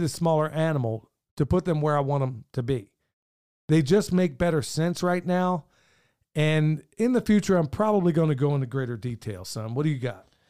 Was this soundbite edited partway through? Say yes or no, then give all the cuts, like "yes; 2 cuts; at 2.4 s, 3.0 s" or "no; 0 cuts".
no; 0 cuts